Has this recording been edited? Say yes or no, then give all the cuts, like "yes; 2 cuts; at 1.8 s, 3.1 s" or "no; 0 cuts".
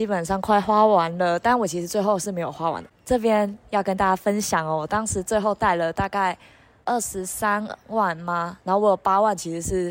no; 0 cuts